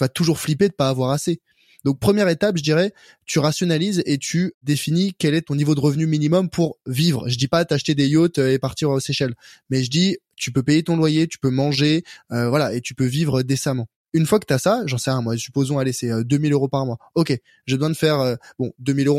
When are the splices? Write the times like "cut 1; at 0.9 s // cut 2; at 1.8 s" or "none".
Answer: none